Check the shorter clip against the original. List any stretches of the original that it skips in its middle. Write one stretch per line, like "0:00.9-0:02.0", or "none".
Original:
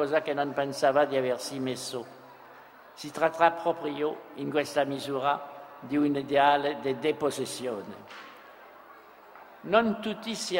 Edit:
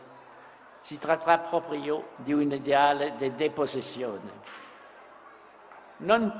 0:04.3-0:05.8